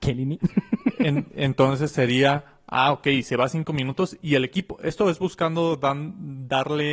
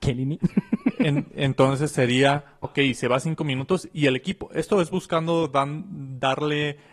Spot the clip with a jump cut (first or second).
second